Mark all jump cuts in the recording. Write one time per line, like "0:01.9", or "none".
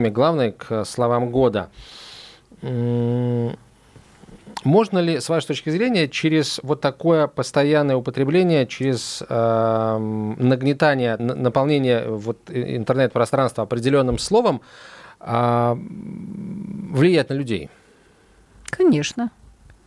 0:11.2